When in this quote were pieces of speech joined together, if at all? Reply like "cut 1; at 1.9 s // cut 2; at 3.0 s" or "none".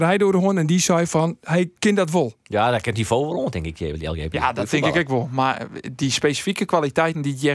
cut 1; at 1.8 s